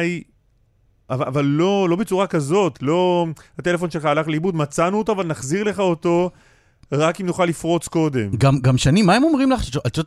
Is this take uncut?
yes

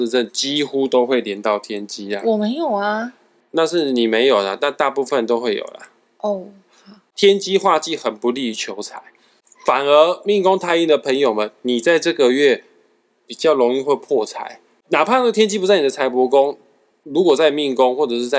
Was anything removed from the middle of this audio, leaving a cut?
no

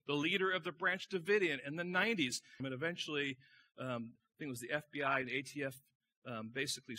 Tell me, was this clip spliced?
yes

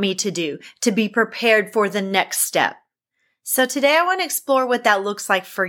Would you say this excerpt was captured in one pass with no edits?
yes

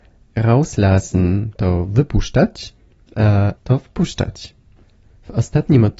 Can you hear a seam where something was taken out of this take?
yes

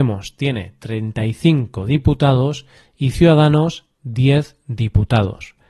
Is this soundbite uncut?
yes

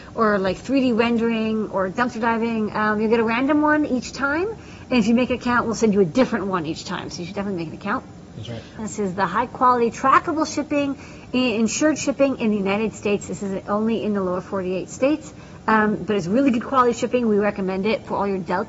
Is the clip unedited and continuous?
no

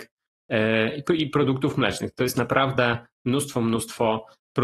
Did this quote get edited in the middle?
no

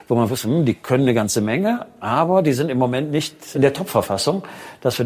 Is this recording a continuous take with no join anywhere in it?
yes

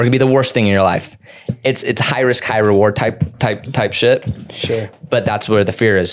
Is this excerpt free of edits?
yes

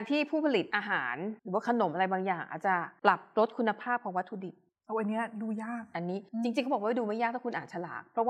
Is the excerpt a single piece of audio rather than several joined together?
no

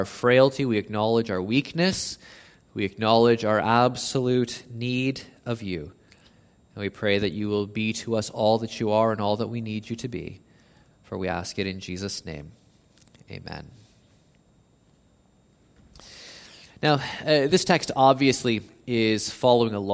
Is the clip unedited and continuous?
yes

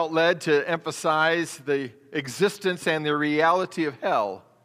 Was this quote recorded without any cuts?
yes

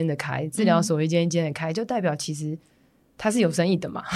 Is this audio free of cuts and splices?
yes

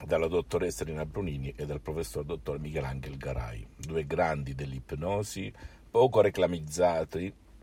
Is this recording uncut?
yes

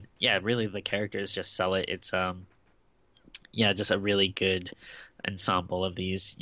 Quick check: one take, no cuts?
yes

